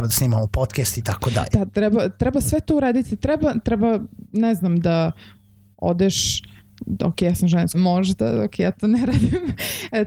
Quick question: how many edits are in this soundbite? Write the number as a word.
one